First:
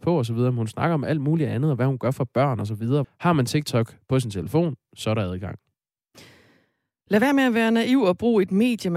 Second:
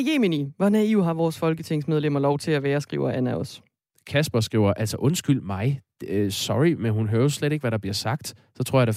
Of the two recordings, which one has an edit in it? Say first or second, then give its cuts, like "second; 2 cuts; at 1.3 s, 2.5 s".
first; 1 cut; at 3.0 s